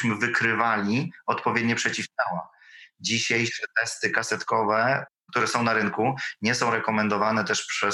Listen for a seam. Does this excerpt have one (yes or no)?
no